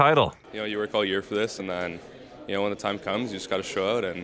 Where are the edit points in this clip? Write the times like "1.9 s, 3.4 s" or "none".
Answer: none

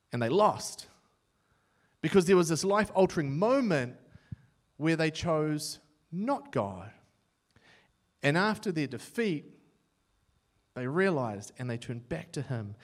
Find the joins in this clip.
none

